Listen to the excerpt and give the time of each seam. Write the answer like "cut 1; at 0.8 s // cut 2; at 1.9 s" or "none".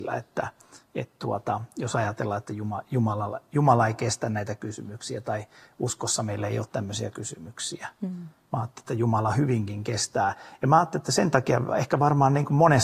none